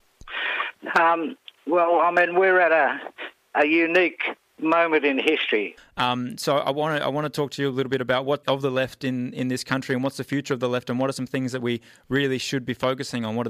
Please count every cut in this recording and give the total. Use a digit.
2